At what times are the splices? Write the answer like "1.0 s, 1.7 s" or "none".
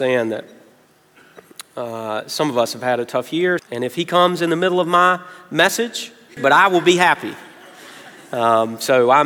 3.6 s, 6.4 s

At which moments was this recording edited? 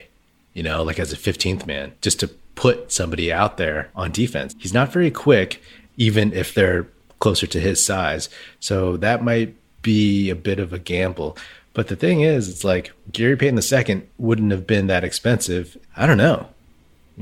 4.5 s, 5.9 s, 15.8 s

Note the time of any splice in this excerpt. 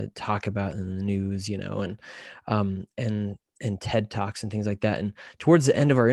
none

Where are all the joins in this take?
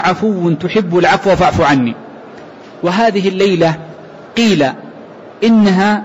none

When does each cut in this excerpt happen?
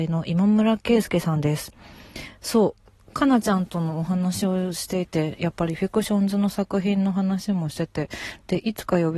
none

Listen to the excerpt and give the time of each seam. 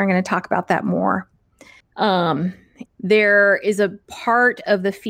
1.8 s, 2.9 s

